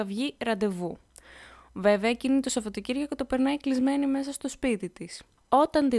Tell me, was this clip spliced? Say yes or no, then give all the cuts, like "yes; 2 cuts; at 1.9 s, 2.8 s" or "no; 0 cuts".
no; 0 cuts